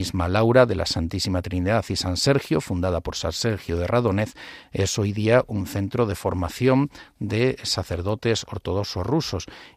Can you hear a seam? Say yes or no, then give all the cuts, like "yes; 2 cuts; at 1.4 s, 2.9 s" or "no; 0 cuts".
no; 0 cuts